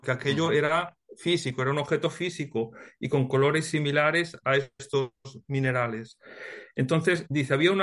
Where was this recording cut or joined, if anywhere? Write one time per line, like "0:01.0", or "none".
none